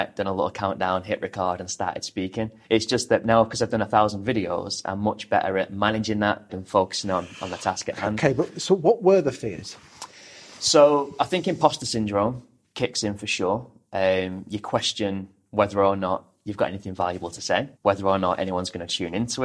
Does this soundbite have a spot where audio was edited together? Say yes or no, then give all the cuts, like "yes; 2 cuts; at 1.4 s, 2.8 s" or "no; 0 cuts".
yes; 3 cuts; at 2.6 s, 6.5 s, 17.8 s